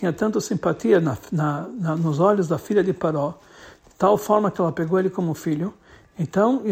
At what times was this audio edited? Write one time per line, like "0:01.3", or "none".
none